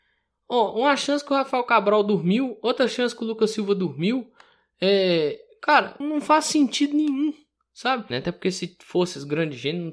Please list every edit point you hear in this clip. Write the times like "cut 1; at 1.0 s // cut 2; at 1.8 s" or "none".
cut 1; at 6.0 s // cut 2; at 8.1 s